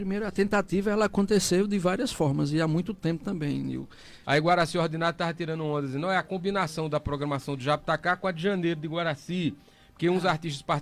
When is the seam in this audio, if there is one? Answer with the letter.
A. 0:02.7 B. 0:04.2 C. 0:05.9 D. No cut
B